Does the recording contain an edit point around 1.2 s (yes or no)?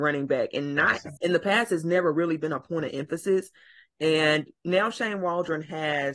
yes